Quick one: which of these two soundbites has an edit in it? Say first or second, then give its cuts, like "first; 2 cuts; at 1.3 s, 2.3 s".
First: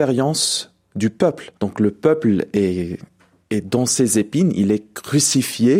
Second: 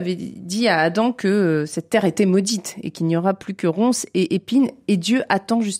first; 1 cut; at 1.6 s